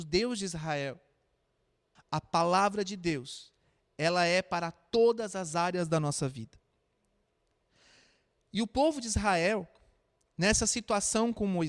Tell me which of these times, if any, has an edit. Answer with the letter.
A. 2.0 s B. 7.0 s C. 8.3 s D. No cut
A